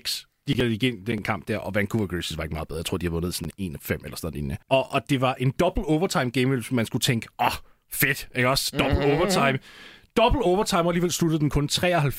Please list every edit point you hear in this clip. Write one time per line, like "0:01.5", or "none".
0:04.6